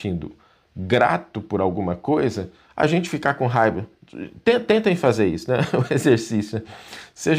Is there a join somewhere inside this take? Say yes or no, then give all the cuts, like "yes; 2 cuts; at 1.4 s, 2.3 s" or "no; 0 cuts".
no; 0 cuts